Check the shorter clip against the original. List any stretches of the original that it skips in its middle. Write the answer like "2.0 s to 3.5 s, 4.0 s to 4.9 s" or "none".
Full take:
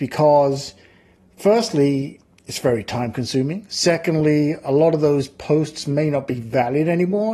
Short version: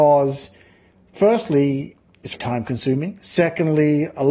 2.6 s to 2.8 s